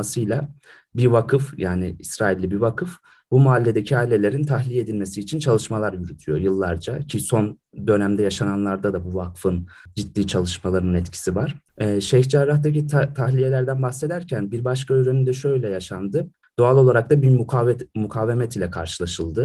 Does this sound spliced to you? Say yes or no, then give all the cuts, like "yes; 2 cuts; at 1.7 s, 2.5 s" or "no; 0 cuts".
yes; 2 cuts; at 11.7 s, 16.4 s